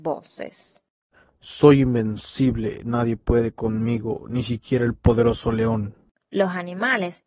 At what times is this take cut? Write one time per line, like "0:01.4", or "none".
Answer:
none